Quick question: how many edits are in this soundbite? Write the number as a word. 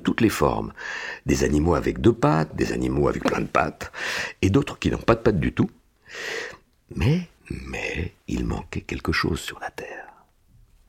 two